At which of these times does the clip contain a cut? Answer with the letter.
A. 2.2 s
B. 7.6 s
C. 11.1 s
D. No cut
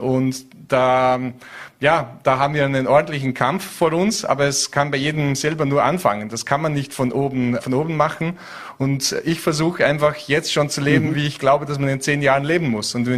B